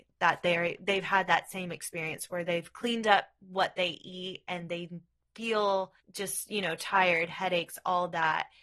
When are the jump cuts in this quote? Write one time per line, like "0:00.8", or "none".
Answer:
0:06.0